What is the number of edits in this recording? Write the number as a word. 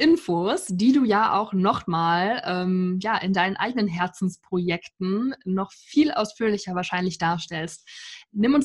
zero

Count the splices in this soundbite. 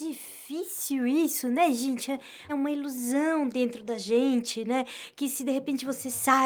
one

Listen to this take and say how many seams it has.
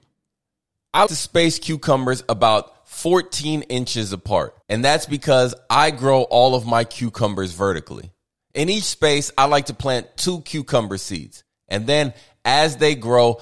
two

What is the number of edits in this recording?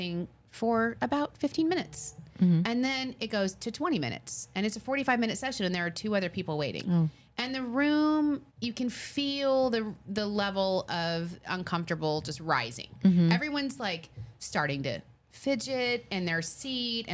one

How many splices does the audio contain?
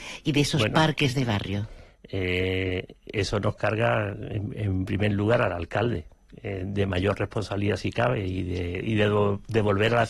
zero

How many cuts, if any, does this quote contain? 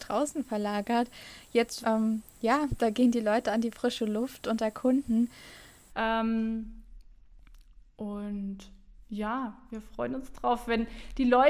two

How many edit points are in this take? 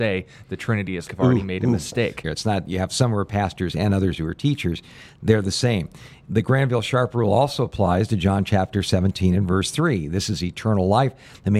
two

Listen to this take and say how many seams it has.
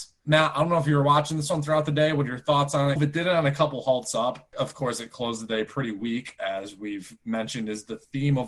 one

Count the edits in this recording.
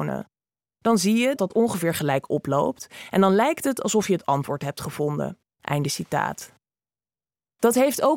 two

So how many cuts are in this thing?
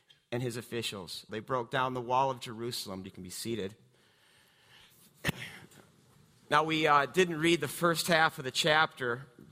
two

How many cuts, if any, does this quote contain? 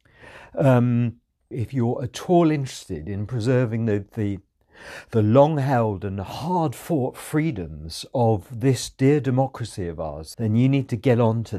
two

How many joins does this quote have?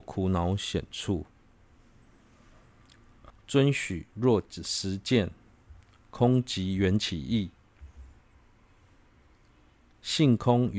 one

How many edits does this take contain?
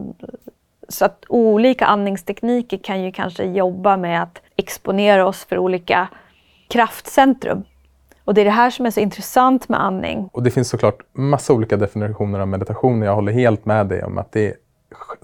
two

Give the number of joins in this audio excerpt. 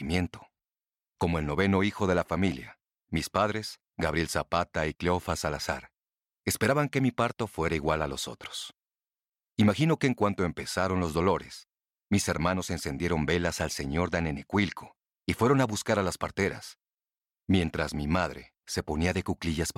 one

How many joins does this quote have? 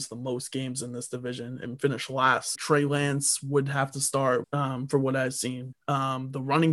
three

